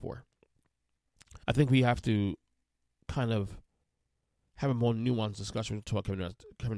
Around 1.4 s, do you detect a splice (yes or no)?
yes